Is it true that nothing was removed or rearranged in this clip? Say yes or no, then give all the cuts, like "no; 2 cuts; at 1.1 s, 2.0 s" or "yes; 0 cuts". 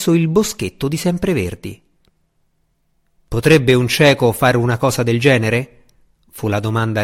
yes; 0 cuts